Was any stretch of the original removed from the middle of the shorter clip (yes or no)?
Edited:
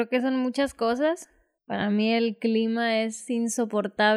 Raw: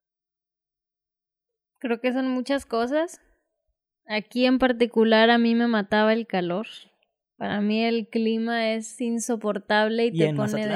yes